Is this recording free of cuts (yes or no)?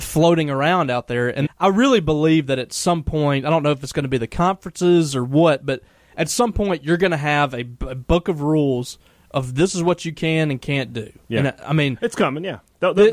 no